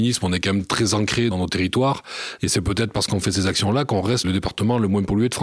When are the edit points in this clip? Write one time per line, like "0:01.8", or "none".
0:02.4